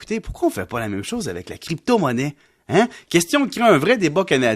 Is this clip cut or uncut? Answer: uncut